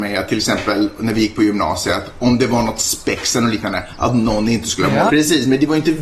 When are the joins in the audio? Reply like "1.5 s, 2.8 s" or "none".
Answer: 5.1 s